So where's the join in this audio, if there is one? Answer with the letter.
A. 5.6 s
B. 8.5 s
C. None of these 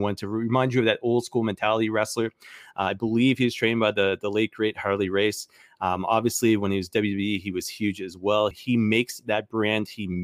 B